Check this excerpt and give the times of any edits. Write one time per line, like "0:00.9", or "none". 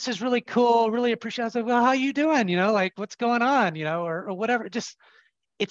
none